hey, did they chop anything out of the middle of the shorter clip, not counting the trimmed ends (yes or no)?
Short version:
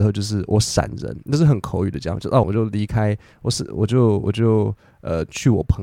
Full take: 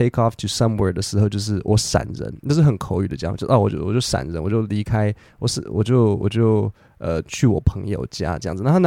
yes